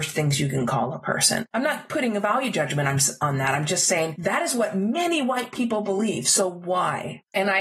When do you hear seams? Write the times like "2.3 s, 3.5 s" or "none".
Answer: none